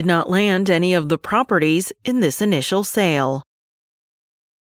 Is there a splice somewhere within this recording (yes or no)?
no